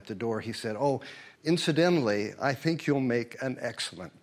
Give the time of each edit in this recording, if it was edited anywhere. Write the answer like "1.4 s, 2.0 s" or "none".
1.3 s